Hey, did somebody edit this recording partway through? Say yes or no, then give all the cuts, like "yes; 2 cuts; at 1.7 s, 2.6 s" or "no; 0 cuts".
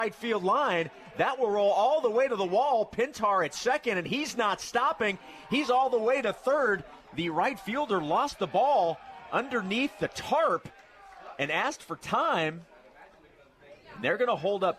no; 0 cuts